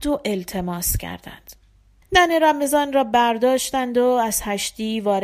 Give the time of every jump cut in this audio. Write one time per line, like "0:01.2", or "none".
0:02.0